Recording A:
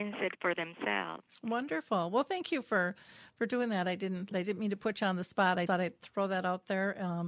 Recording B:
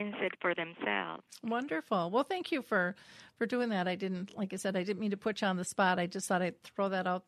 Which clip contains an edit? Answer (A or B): A